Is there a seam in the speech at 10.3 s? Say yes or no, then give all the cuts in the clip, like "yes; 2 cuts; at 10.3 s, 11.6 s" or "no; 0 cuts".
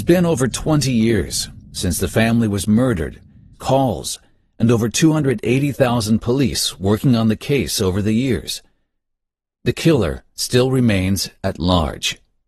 no; 1 cut; at 3.5 s